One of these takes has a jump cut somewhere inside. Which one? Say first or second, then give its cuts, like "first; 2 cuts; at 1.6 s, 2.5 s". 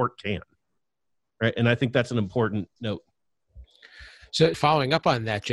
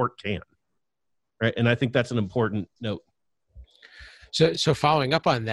first; 1 cut; at 4.5 s